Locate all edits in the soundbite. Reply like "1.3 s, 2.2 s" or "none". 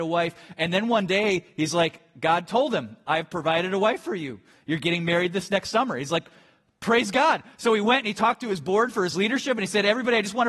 none